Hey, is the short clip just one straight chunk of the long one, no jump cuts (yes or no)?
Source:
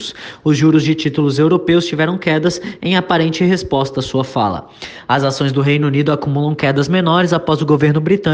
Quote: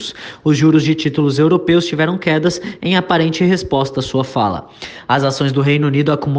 yes